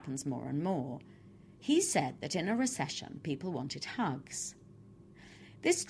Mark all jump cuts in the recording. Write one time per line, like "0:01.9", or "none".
0:01.6